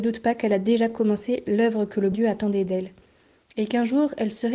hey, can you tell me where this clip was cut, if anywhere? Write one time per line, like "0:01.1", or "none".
0:02.1